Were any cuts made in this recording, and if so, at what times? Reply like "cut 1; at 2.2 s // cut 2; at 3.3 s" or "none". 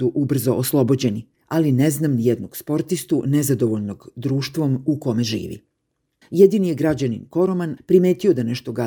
cut 1; at 6.2 s // cut 2; at 7.8 s